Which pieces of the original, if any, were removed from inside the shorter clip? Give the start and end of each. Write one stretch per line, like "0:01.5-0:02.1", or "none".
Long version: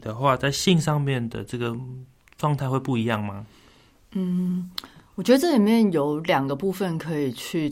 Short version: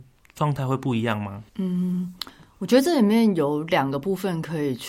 0:03.5-0:04.1

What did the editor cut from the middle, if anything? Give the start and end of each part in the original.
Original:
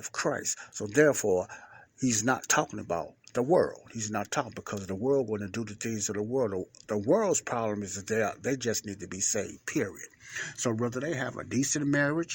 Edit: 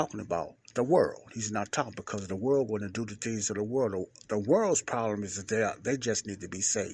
none

